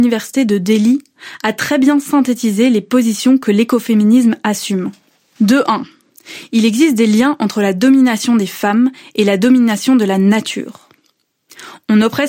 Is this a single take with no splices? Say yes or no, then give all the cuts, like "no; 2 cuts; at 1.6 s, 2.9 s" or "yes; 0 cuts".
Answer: yes; 0 cuts